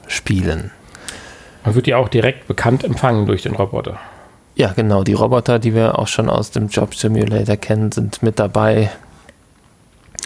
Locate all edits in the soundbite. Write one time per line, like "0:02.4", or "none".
none